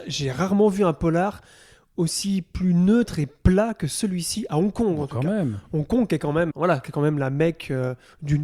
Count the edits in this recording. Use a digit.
1